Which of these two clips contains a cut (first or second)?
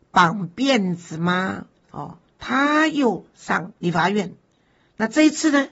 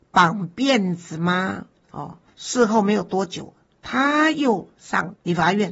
first